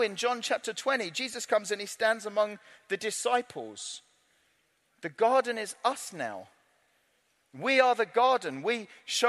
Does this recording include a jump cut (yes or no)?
no